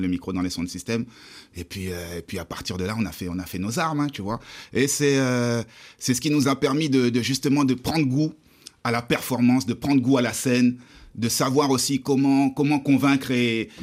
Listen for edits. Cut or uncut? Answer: uncut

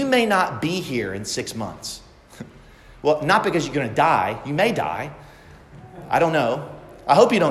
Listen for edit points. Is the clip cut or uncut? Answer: uncut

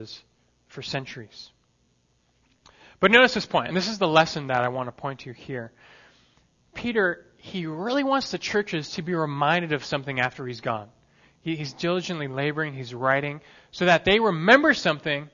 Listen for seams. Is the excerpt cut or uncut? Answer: uncut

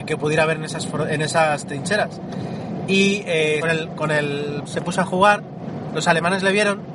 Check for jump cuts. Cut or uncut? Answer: cut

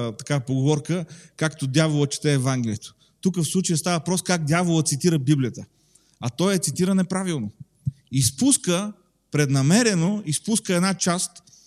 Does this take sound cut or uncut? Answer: uncut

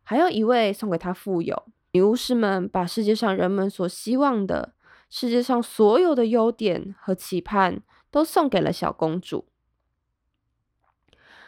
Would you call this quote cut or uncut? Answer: uncut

